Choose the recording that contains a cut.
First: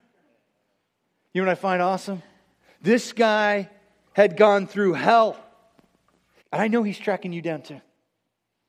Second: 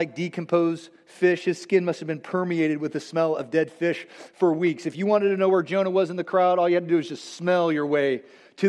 first; 1 cut; at 6.4 s

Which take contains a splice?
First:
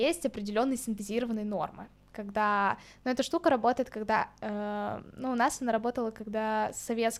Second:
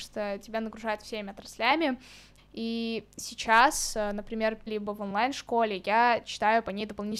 second; 2 cuts; at 2.4 s, 4.7 s

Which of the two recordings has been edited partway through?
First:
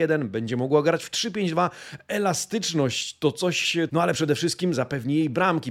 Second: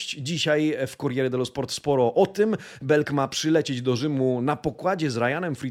first; 1 cut; at 3.9 s

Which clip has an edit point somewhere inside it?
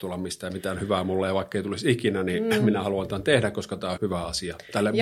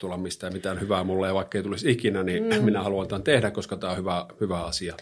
first; 1 cut; at 4.0 s

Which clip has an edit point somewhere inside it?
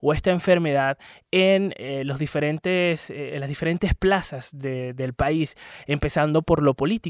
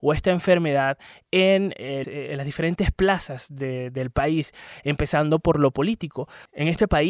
second; 1 cut; at 2.0 s

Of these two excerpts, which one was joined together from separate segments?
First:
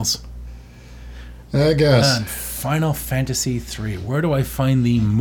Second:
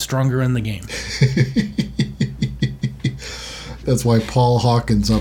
second; 1 cut; at 3.8 s

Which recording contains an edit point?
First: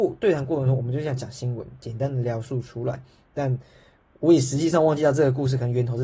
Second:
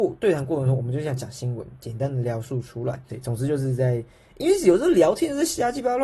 second; 1 cut; at 3.1 s

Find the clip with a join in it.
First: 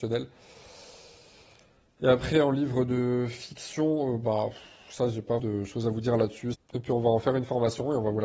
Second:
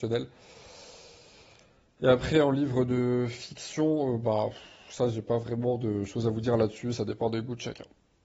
first; 2 cuts; at 5.4 s, 6.5 s

